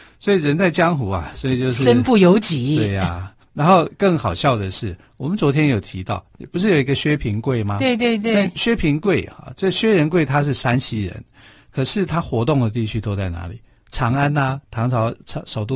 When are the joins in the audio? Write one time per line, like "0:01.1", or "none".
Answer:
none

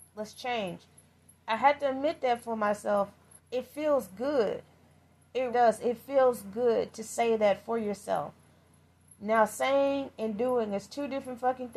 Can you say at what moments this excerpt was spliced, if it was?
0:03.4
0:05.5

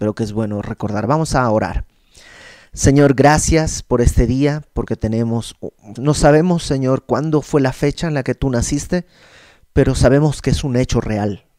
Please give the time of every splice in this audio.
0:06.0

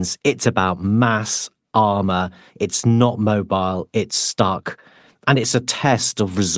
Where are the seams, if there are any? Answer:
none

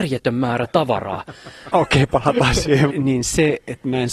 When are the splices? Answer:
0:01.7
0:02.9

